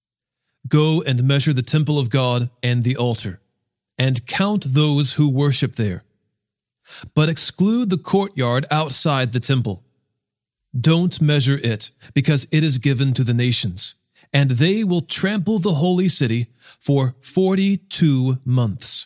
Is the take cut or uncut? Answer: uncut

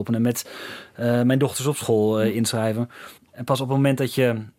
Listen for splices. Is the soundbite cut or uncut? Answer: cut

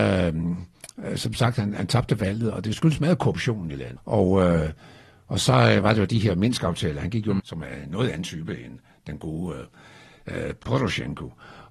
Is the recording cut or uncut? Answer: cut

